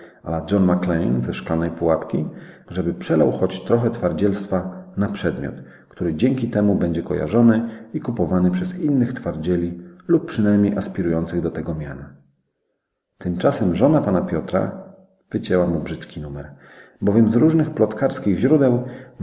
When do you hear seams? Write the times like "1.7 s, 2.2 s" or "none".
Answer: 2.6 s